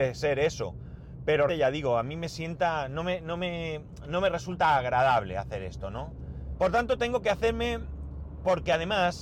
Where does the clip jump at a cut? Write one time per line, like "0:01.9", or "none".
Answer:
0:01.5
0:06.5